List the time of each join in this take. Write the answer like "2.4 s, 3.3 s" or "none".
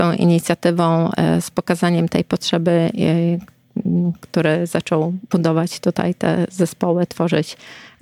2.9 s